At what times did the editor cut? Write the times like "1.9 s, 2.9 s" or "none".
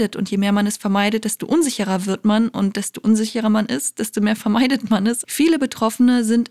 5.2 s